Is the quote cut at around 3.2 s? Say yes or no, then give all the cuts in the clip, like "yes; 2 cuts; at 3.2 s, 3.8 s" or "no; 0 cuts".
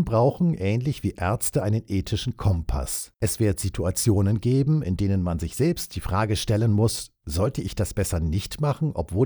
yes; 1 cut; at 3.2 s